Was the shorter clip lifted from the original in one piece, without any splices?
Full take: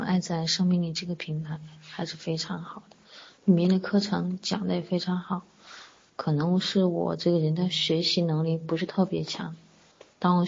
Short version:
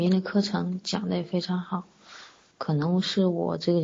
yes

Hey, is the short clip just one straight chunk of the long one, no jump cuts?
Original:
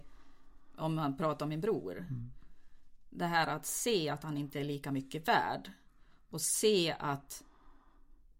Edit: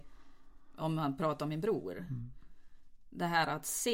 yes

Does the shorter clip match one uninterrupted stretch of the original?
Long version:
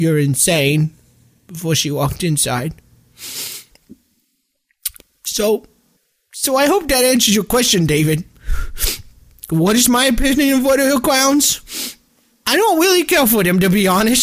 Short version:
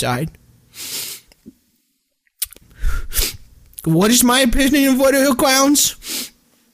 no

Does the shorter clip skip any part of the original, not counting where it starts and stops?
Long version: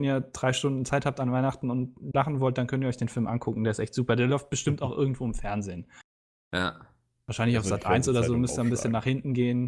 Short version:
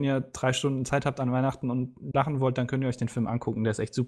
no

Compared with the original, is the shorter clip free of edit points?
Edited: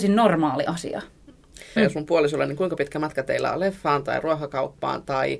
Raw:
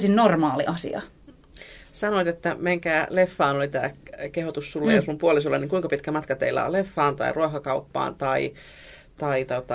no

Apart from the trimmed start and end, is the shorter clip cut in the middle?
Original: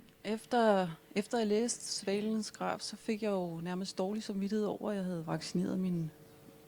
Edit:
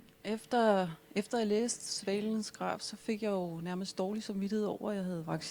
no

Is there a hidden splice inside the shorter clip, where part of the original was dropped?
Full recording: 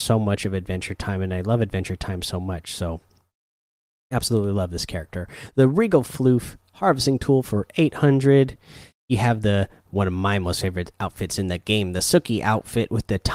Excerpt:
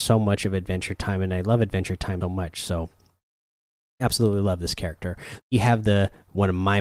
yes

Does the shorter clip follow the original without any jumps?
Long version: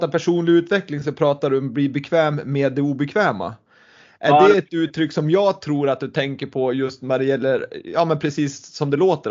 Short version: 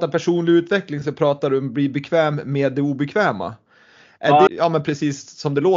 no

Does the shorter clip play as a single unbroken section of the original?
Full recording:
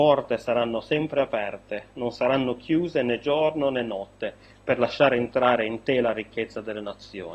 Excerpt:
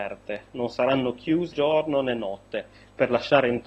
no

